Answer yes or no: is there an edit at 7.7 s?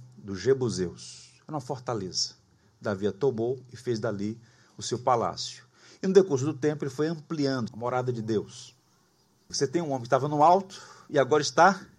yes